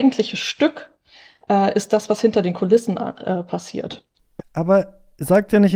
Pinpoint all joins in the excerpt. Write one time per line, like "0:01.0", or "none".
none